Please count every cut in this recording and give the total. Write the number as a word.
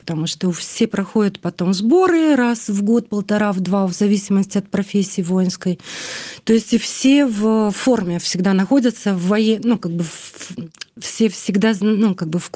zero